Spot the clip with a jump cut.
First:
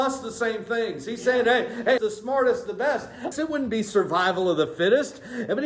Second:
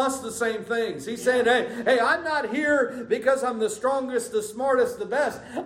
first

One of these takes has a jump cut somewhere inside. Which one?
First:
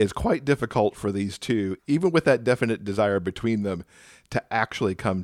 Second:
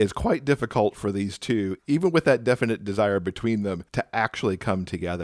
second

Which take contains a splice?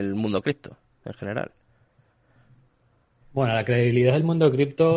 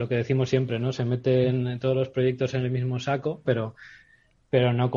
second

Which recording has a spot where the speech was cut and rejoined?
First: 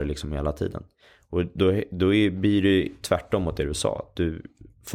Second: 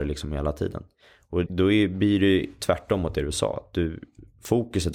second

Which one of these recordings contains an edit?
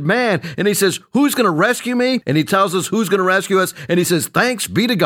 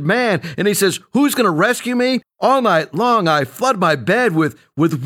second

